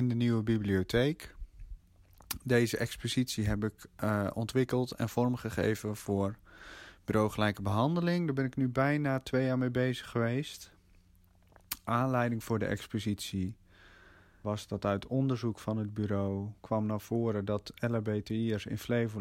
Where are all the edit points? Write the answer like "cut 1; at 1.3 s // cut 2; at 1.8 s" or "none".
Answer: cut 1; at 14.4 s // cut 2; at 16.6 s